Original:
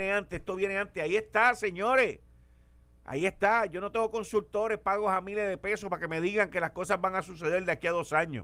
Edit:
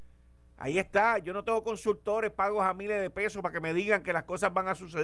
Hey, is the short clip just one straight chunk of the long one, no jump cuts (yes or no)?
yes